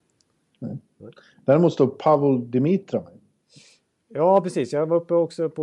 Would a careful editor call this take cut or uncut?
uncut